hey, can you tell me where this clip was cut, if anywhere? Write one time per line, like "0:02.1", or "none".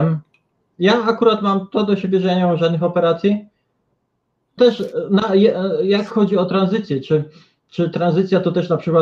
0:04.6